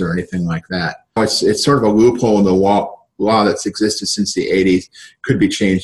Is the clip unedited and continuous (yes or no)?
no